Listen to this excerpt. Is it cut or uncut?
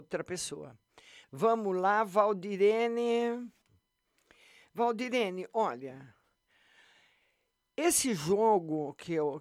cut